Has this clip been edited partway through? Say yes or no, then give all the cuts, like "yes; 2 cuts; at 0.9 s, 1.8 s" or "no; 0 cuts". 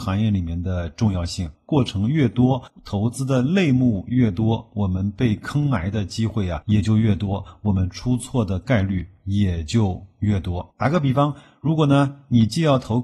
yes; 1 cut; at 1.5 s